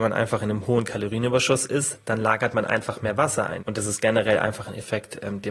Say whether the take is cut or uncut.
cut